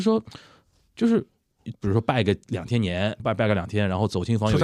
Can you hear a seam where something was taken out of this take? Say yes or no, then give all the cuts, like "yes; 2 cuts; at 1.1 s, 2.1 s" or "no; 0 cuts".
yes; 2 cuts; at 1.7 s, 3.2 s